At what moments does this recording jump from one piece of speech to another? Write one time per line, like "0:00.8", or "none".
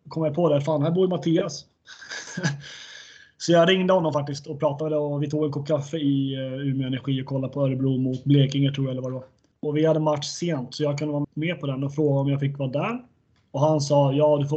0:09.5
0:11.2